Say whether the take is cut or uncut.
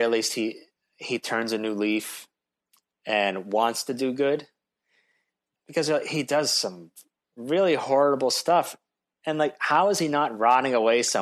cut